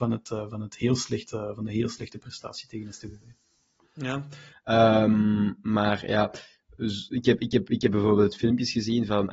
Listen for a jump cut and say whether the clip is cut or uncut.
cut